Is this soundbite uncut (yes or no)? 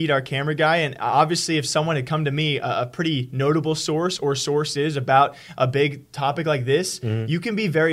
yes